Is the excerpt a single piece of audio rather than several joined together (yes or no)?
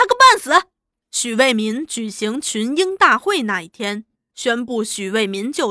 no